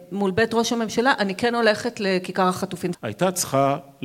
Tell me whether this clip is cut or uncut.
cut